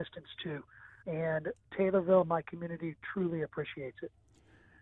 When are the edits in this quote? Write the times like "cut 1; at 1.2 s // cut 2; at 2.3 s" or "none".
cut 1; at 1.0 s